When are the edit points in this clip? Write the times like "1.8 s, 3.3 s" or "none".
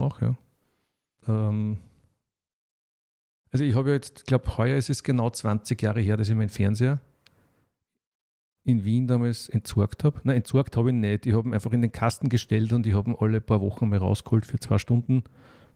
1.2 s